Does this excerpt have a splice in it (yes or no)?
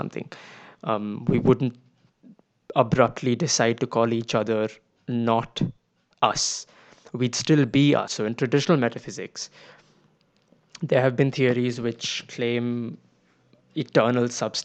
yes